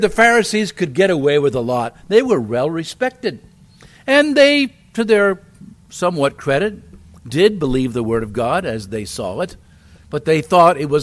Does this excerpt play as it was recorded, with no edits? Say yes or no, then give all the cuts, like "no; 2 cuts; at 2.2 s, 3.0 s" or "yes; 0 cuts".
yes; 0 cuts